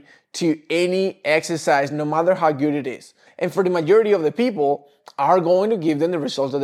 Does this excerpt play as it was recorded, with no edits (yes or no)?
no